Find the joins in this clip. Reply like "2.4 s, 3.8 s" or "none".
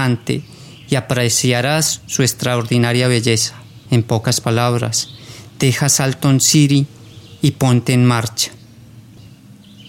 none